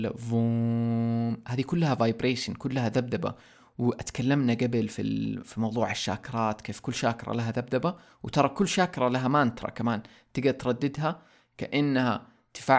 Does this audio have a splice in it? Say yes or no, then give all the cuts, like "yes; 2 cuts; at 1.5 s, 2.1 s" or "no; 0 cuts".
no; 0 cuts